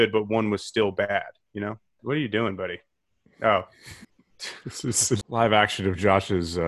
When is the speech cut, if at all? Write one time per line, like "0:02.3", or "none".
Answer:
0:02.0
0:04.0
0:05.2